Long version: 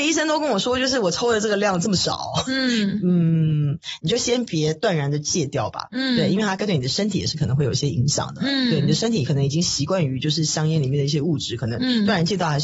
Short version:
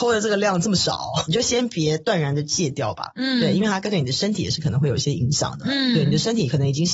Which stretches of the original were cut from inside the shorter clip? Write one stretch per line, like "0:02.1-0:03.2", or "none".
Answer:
0:02.4-0:04.0